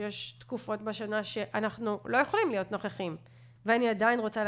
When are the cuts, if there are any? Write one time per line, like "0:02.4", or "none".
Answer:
0:03.6